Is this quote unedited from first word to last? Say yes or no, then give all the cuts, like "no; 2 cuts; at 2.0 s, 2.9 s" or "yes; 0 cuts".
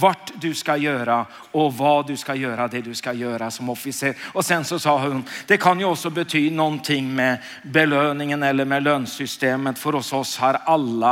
yes; 0 cuts